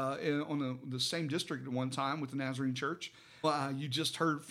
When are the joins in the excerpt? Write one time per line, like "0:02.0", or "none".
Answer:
0:03.4